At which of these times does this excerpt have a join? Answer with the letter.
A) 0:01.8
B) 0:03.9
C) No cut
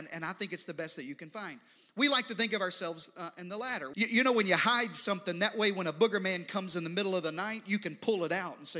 B